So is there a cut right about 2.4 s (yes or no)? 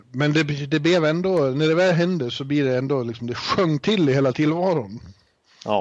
no